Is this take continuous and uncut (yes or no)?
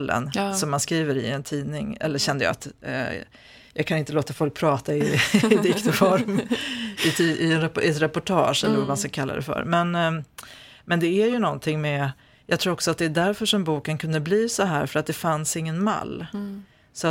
yes